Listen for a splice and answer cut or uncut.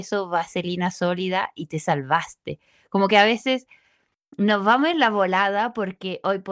uncut